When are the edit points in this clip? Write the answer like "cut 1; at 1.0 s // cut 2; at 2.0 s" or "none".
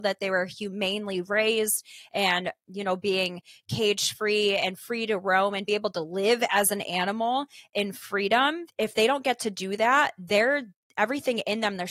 none